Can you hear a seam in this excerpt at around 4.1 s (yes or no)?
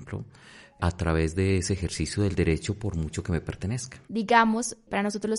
yes